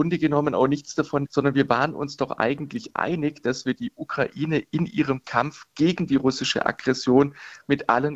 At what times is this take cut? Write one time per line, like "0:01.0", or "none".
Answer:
0:01.3

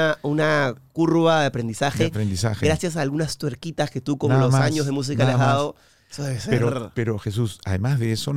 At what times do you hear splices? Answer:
none

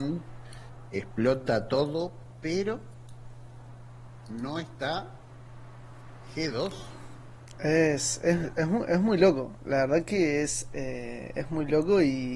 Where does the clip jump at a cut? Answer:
none

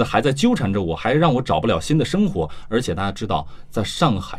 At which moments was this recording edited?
none

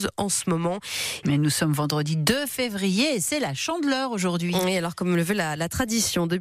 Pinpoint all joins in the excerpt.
0:01.2

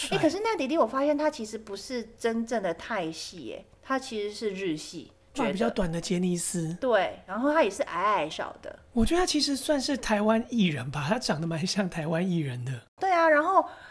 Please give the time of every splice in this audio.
0:05.3
0:08.3

